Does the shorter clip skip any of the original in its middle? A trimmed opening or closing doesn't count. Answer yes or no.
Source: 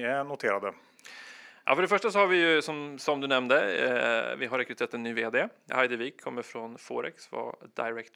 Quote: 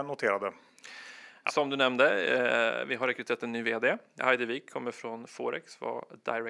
yes